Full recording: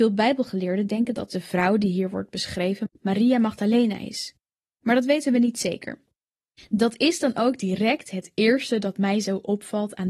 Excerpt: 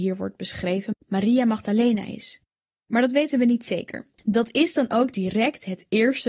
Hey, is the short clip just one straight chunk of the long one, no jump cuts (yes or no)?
no